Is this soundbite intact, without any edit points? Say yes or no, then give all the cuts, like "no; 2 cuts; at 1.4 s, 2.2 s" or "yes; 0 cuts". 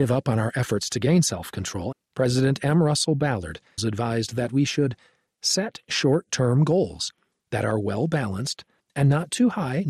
no; 3 cuts; at 1.9 s, 3.8 s, 8.8 s